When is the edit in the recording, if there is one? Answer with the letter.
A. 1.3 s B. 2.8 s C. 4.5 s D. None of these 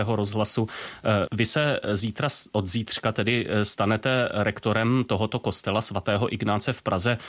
A